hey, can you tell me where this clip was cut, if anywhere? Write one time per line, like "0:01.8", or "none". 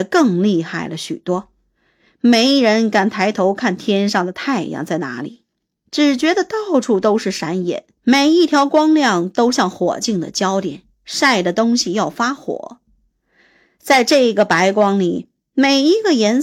0:08.0